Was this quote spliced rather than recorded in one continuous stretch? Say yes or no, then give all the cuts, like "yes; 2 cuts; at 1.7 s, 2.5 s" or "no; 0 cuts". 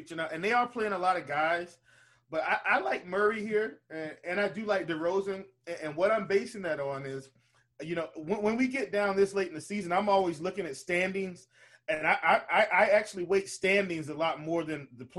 no; 0 cuts